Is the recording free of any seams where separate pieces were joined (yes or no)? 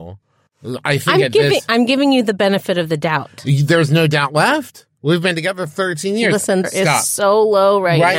no